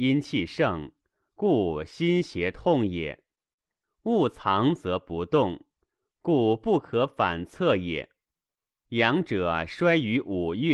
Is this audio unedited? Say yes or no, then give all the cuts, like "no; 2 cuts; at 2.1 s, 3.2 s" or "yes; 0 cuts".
no; 2 cuts; at 3.8 s, 8.8 s